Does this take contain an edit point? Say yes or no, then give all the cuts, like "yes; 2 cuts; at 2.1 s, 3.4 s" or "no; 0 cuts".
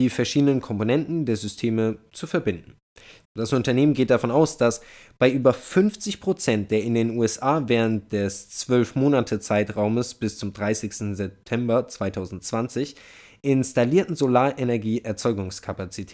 yes; 1 cut; at 3.2 s